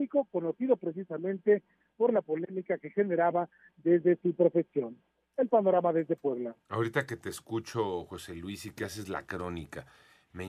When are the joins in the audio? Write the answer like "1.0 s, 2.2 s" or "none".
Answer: none